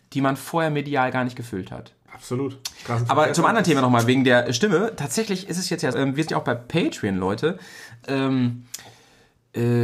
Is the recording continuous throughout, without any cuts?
no; 3 cuts; at 2.1 s, 5.9 s, 8.0 s

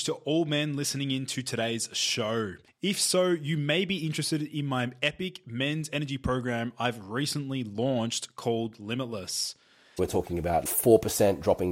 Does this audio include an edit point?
yes; 2 cuts; at 2.7 s, 10.0 s

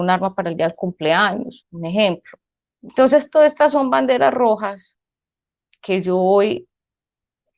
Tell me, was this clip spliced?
yes; 1 cut; at 2.9 s

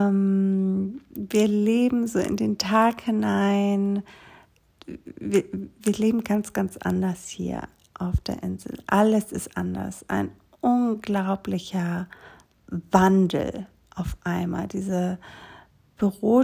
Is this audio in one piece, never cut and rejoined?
yes; 0 cuts

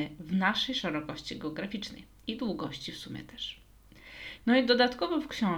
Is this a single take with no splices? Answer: no; 1 cut; at 4.4 s

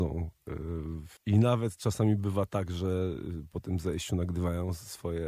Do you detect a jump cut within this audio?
yes; 1 cut; at 1.2 s

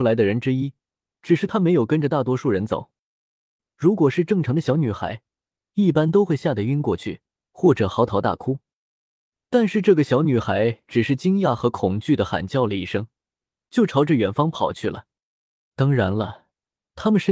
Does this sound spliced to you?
yes; 2 cuts; at 3.6 s, 15.7 s

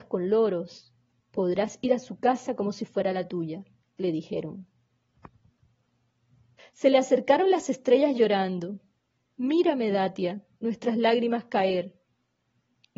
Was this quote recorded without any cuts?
no; 2 cuts; at 1.2 s, 6.6 s

